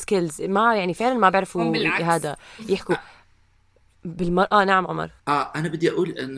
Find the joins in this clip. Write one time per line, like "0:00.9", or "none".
0:05.2